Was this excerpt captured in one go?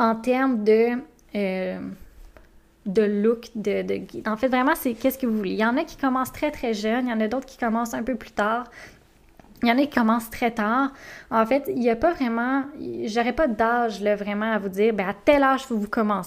yes; 0 cuts

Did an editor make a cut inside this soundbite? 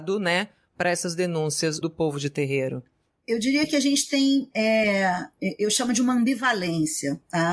yes; 1 cut; at 1.8 s

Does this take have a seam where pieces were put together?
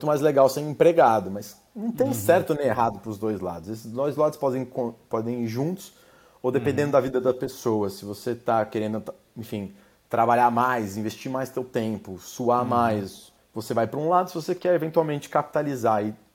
yes; 1 cut; at 13.4 s

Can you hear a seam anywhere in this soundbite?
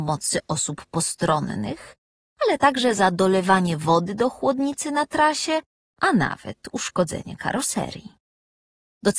yes; 1 cut; at 5.9 s

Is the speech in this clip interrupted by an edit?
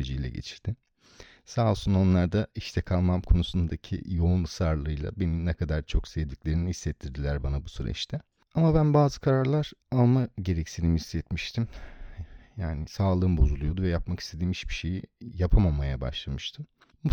no; 0 cuts

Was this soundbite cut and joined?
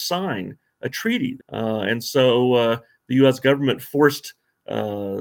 yes; 1 cut; at 1.4 s

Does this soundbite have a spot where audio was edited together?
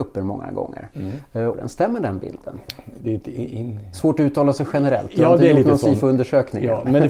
yes; 2 cuts; at 1.5 s, 3.0 s

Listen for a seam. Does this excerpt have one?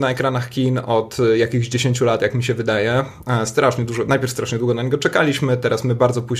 no; 0 cuts

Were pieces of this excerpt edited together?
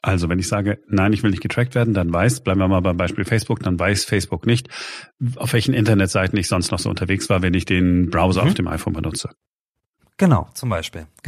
no; 0 cuts

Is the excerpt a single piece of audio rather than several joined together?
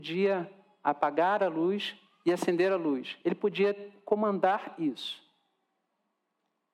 yes; 0 cuts

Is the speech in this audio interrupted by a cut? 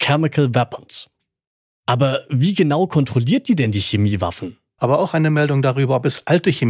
yes; 1 cut; at 4.8 s

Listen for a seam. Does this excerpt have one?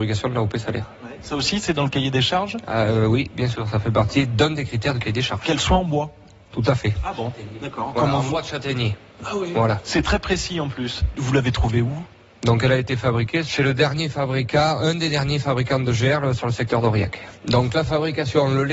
no; 0 cuts

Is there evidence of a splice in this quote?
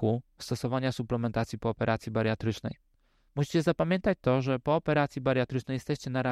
no; 0 cuts

